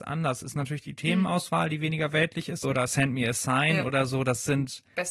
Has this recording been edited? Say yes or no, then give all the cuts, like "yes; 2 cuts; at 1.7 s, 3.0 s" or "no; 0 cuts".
yes; 1 cut; at 2.6 s